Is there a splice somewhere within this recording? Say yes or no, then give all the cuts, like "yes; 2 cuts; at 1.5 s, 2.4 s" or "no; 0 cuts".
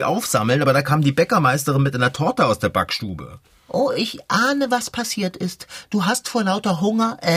no; 0 cuts